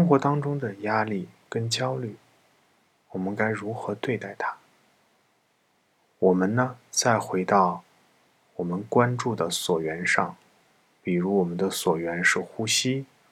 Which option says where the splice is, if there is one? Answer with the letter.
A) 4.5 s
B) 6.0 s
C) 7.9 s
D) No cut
B